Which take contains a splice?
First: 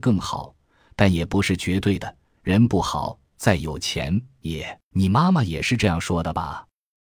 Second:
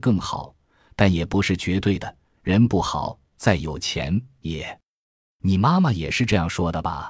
first; 1 cut; at 4.9 s

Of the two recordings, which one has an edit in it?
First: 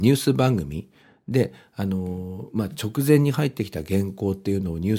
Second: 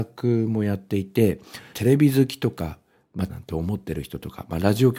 second; 2 cuts; at 1.7 s, 3.3 s

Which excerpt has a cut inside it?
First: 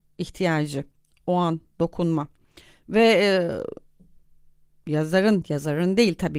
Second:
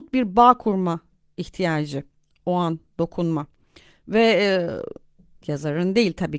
second; 1 cut; at 5.4 s

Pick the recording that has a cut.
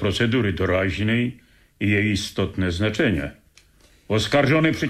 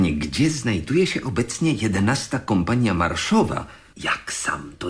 second; 1 cut; at 3.9 s

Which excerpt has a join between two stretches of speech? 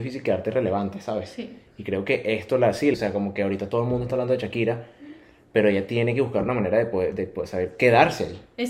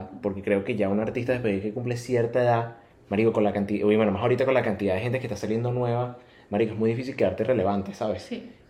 first; 1 cut; at 2.9 s

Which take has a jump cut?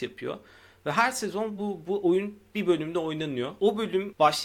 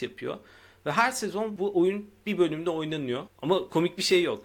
second; 2 cuts; at 1.6 s, 3.3 s

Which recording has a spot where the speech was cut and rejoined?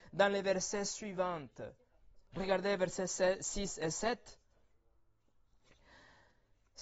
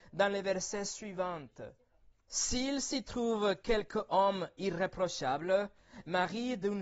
second; 1 cut; at 2.1 s

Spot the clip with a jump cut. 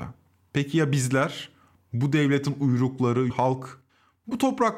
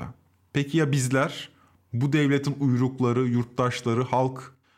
first; 1 cut; at 3.3 s

